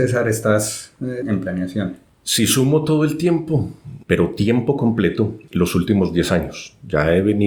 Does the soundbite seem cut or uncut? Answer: cut